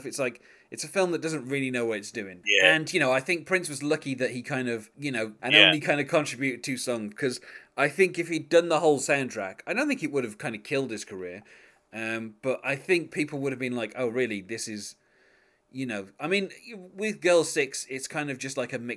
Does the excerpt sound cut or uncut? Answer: cut